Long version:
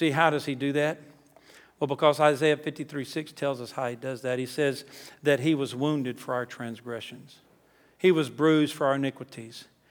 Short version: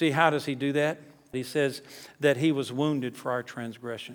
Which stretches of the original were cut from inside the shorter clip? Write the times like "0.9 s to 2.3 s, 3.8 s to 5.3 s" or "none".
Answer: 1.3 s to 4.4 s

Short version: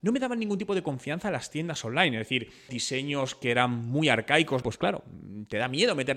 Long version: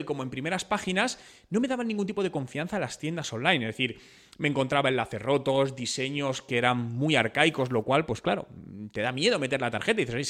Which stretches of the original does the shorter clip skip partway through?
4.2 s to 5.8 s, 7.7 s to 8.1 s

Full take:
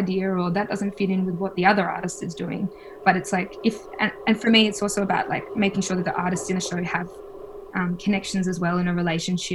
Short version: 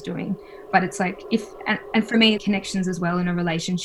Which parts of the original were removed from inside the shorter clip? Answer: 4.7 s to 8.0 s

